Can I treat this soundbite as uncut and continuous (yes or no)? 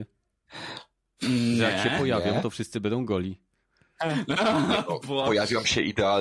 yes